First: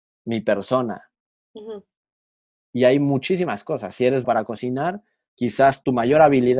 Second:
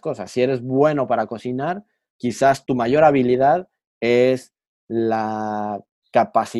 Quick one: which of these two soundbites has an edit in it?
first; 1 cut; at 4.2 s

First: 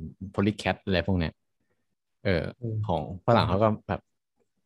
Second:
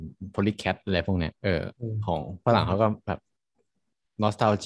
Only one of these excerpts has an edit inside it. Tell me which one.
second; 1 cut; at 1.4 s

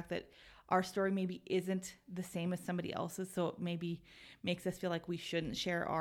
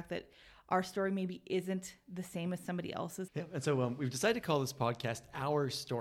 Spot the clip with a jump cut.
second; 1 cut; at 3.3 s

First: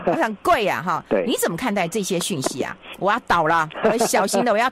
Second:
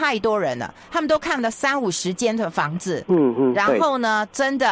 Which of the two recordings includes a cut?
first; 1 cut; at 2.9 s

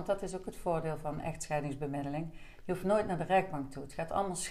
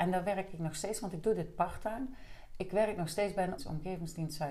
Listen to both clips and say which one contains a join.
second; 1 cut; at 3.6 s

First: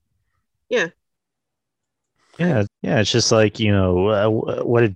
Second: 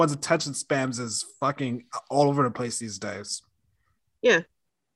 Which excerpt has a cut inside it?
first; 1 cut; at 2.7 s

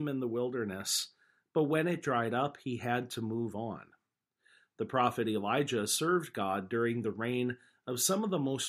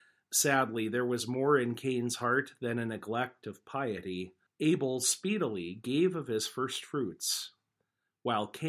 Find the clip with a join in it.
second; 1 cut; at 4.5 s

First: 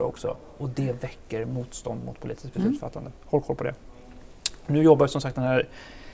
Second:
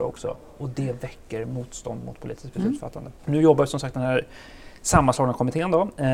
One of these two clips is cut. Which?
second; 1 cut; at 3.2 s

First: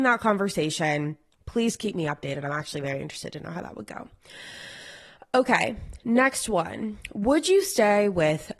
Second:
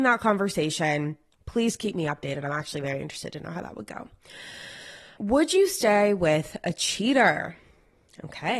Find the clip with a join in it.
second; 1 cut; at 5.2 s

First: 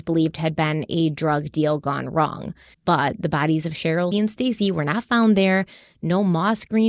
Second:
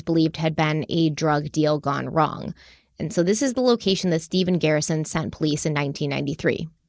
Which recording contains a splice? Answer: first; 2 cuts; at 2.7 s, 4.1 s

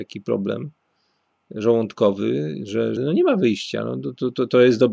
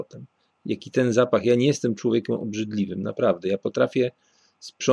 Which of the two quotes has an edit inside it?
first; 1 cut; at 3.0 s

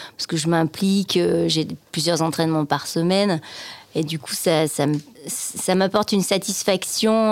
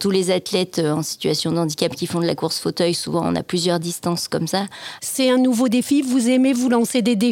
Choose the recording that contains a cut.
second; 1 cut; at 5.0 s

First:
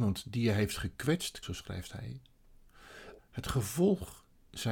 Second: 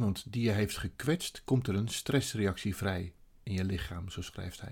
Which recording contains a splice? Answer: first; 2 cuts; at 1.4 s, 3.2 s

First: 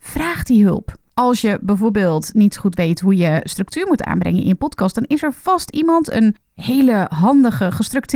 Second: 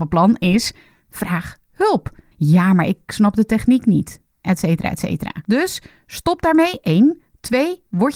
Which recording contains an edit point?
second; 1 cut; at 2.3 s

